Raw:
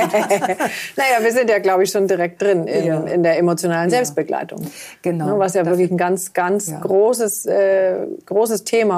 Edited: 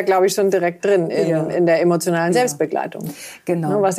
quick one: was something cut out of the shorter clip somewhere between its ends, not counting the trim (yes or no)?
no